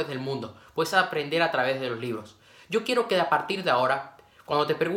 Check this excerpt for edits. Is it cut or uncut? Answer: uncut